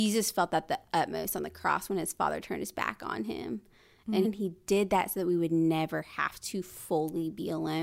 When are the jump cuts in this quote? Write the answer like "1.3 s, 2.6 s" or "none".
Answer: 4.2 s